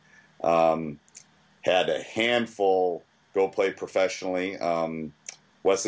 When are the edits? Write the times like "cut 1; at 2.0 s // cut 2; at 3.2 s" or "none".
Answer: none

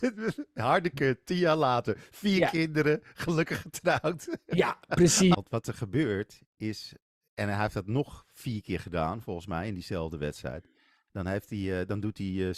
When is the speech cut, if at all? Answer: cut 1; at 5.3 s

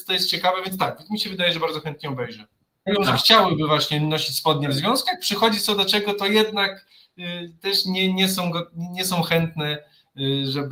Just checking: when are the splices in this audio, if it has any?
cut 1; at 2.9 s

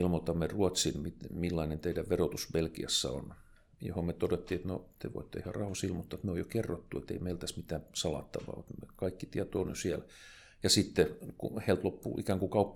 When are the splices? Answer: none

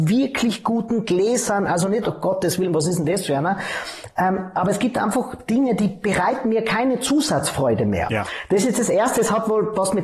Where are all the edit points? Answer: cut 1; at 2.0 s

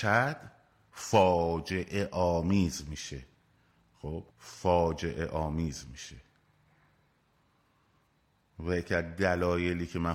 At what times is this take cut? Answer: cut 1; at 4.3 s

